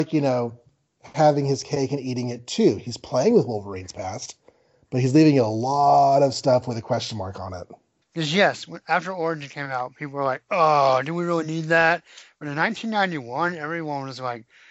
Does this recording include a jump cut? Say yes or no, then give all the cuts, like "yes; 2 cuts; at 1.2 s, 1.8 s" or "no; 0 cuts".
yes; 1 cut; at 8.0 s